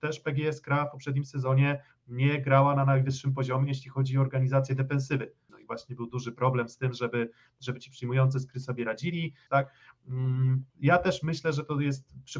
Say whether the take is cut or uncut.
cut